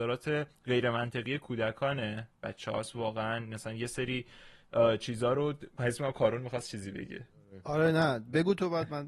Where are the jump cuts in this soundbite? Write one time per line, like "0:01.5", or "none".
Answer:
0:05.8